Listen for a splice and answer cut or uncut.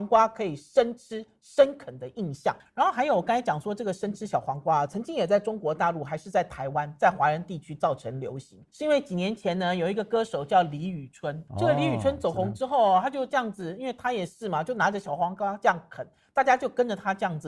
cut